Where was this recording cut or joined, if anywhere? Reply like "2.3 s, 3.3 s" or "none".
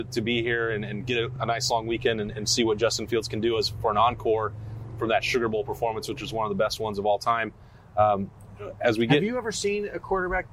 none